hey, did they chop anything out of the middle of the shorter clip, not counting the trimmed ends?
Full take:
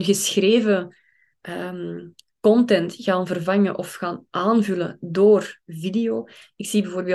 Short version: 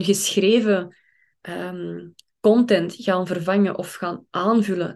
no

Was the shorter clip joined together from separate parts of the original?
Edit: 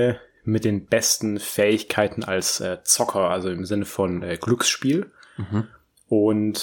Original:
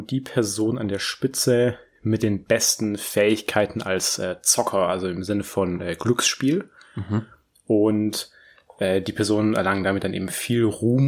no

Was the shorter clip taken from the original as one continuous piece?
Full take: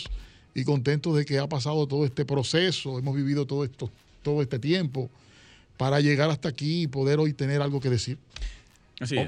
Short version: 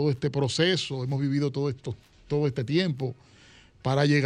yes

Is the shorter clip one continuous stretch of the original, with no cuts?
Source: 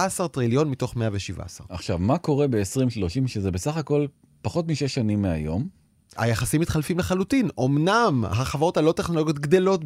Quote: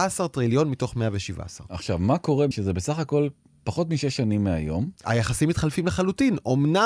no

